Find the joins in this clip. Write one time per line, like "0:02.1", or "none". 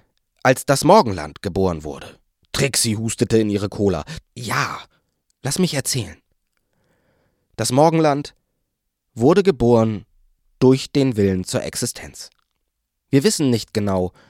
0:04.2